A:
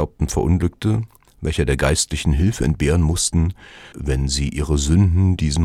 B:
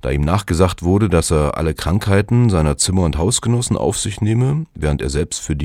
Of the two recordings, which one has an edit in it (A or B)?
A